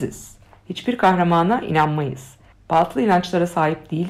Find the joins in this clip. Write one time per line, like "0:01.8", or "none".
0:02.5

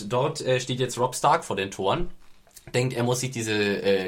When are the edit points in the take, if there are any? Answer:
none

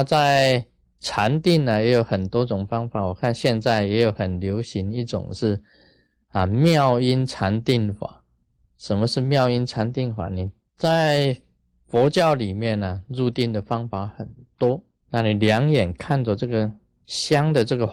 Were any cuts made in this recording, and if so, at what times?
0:10.7
0:15.0

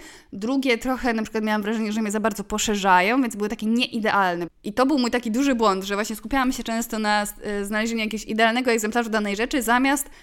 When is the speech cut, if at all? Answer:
0:04.5

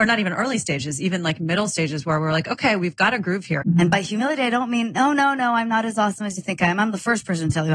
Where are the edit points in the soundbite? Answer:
0:03.6

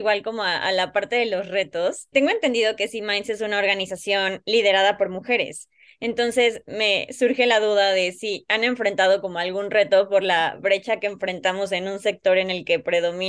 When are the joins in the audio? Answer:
0:02.1

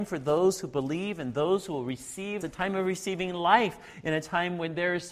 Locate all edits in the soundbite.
0:02.4

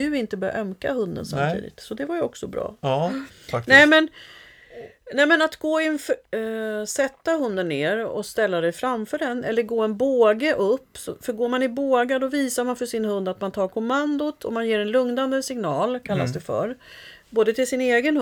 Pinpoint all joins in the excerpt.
0:06.2

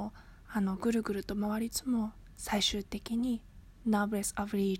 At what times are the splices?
0:01.7

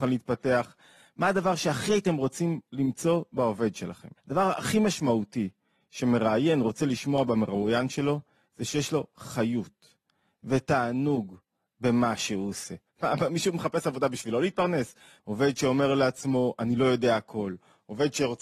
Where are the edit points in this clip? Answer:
0:04.2
0:12.9
0:15.2

